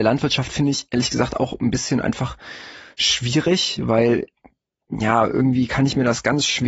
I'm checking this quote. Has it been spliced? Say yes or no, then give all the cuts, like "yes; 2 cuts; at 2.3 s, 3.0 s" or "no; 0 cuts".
no; 0 cuts